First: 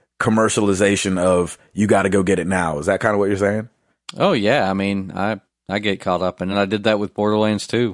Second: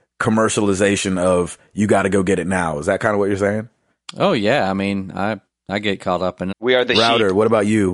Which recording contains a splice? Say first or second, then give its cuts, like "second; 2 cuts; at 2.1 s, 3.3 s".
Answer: second; 1 cut; at 6.5 s